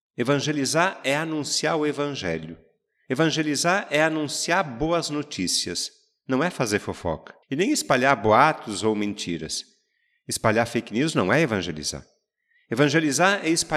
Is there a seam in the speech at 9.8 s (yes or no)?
no